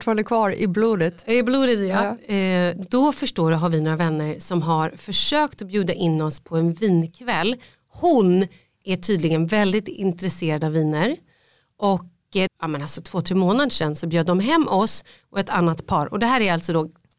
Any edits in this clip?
yes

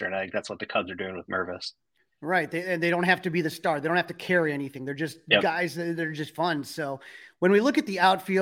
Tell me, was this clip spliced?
no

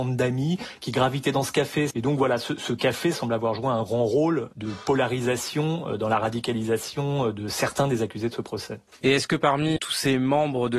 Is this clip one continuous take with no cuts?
no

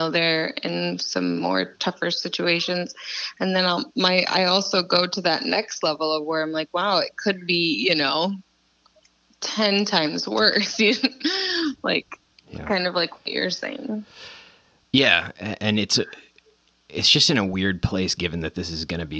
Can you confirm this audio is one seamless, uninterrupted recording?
yes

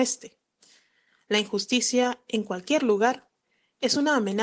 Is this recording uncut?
yes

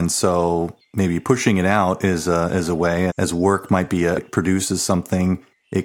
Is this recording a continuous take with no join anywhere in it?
no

